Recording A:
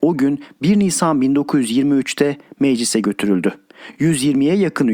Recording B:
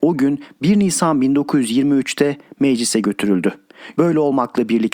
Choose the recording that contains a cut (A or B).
B